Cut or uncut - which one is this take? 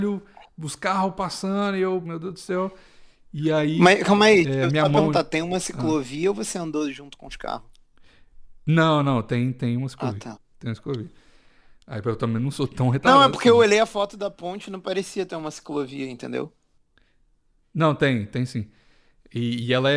cut